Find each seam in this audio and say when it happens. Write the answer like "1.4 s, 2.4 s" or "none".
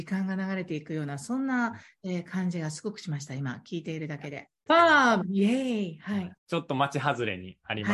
4.7 s, 6.4 s